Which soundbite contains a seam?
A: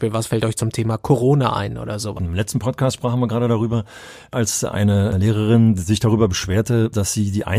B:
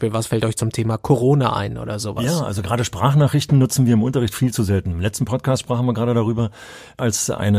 A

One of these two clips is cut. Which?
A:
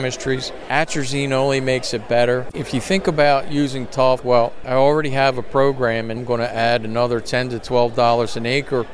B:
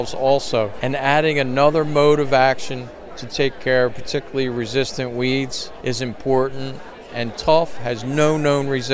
A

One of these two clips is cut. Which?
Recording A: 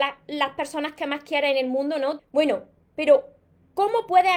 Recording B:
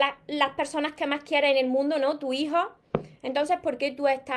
A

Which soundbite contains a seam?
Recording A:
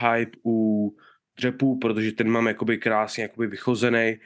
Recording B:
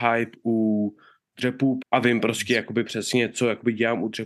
B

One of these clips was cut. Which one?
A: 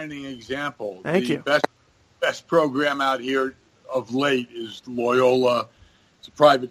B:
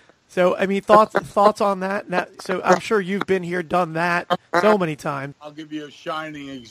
B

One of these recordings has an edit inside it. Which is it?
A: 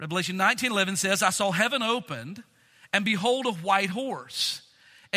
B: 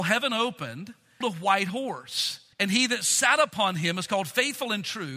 B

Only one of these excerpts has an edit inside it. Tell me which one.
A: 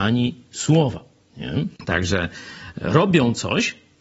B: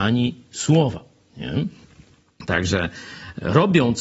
A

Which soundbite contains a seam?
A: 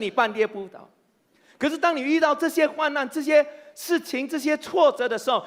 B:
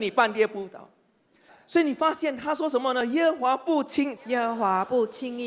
B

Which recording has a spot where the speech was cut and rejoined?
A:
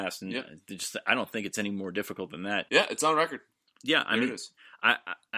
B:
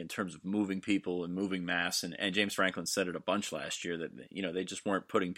A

